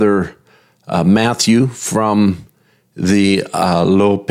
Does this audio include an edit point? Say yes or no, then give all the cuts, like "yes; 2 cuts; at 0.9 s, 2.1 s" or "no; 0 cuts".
no; 0 cuts